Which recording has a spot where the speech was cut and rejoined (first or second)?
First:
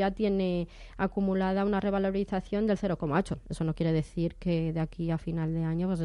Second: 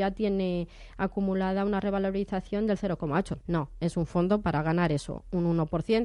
second